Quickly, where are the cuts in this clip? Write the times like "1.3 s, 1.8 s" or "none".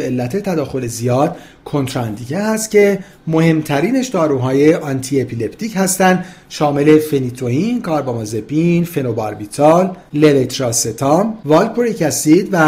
none